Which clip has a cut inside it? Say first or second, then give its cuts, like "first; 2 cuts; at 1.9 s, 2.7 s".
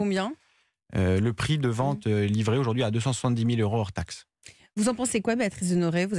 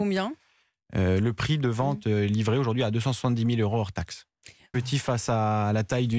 second; 1 cut; at 4.7 s